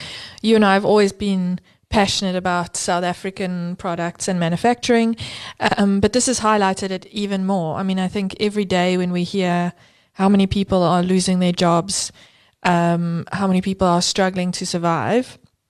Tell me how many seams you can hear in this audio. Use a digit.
0